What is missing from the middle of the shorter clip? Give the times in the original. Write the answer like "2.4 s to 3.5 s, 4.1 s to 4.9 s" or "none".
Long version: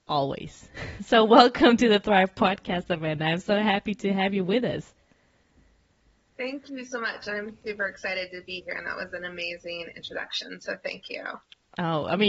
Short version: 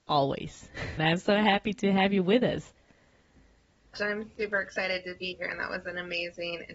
1.0 s to 3.2 s, 6.1 s to 7.2 s